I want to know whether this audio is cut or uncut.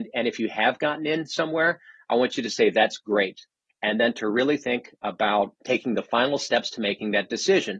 cut